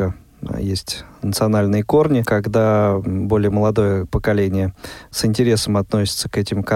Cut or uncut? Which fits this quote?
cut